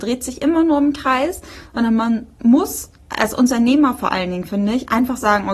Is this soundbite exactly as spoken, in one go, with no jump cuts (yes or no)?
no